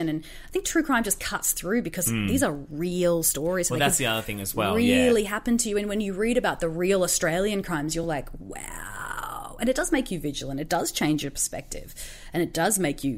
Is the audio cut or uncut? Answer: uncut